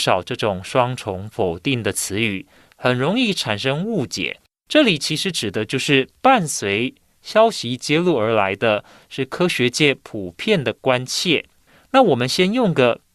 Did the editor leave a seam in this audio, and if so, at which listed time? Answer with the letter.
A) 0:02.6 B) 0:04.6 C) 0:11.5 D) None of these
D